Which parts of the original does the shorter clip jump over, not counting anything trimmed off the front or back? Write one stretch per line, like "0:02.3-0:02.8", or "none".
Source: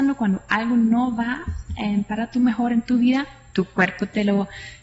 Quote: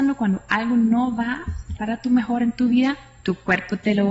0:01.8-0:02.1